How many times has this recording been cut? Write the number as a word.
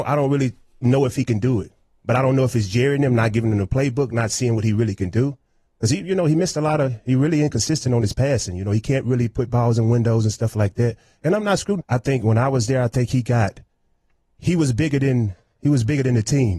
one